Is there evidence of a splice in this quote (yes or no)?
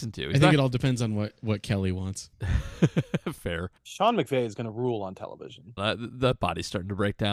yes